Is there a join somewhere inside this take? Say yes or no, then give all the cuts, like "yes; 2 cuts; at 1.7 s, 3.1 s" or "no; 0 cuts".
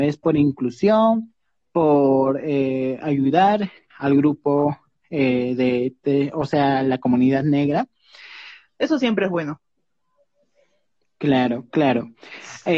yes; 2 cuts; at 3.9 s, 8.7 s